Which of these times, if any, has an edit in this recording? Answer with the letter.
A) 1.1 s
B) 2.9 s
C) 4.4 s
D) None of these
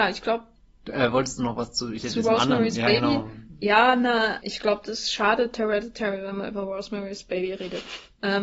C